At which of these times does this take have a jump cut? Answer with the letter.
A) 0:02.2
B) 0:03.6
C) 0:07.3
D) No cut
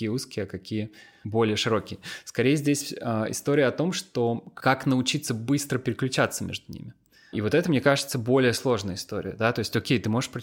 C